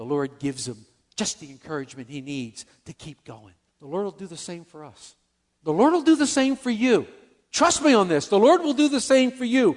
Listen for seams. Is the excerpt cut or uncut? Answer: cut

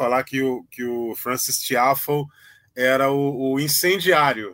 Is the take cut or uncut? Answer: uncut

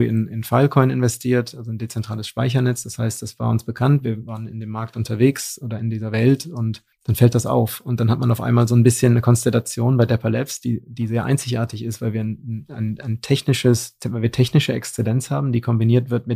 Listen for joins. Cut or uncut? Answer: cut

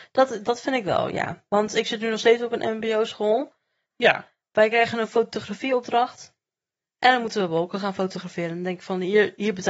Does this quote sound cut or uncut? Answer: cut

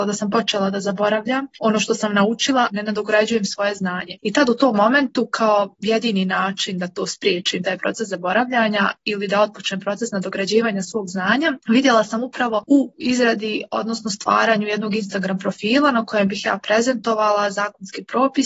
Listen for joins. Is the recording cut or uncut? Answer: cut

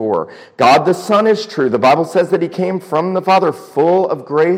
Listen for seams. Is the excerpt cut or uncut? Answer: uncut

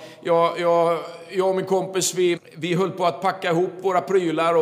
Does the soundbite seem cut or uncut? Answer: cut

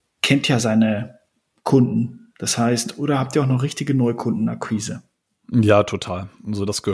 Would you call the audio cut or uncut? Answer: uncut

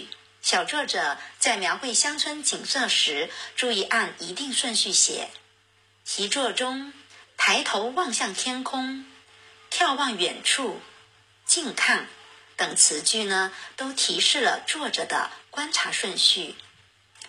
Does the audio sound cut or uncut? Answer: uncut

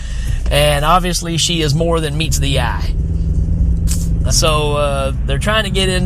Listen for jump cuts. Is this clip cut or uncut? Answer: cut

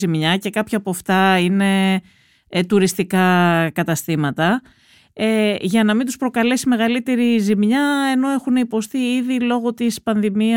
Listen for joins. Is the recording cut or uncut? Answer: uncut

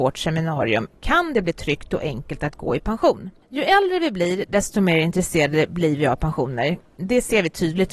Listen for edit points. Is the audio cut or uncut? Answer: uncut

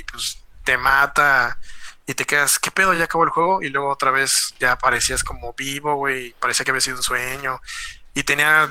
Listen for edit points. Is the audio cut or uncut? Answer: uncut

